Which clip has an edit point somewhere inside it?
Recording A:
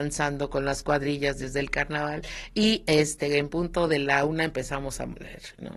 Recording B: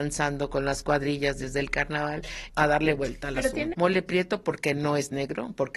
B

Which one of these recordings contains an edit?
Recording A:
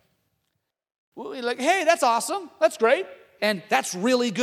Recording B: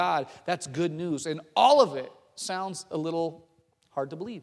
A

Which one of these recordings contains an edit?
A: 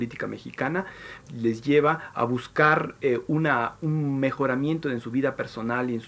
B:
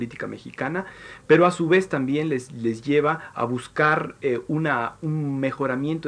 A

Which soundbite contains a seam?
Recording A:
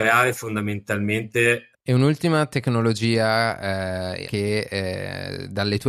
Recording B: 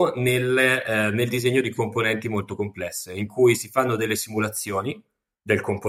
A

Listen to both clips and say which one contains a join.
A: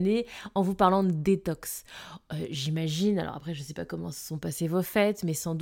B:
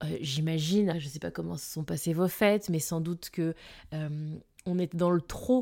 B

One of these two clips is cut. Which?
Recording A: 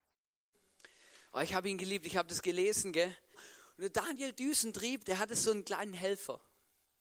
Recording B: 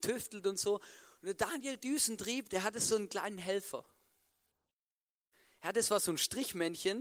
A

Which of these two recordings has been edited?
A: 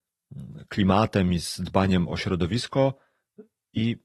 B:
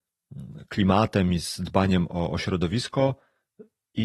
A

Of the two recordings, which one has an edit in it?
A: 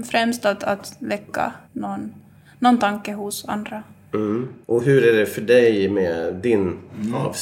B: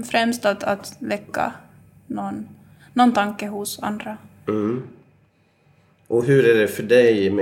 A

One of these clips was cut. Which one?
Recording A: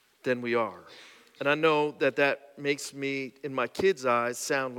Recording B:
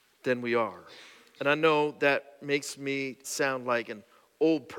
B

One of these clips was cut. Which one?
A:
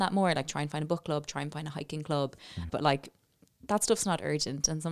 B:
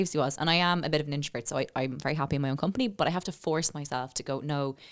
A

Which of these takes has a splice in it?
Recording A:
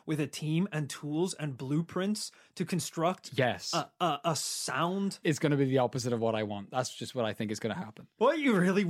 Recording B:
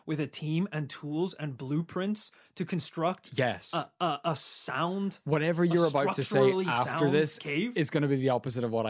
A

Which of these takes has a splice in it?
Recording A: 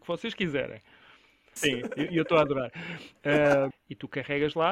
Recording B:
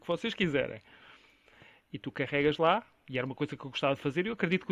A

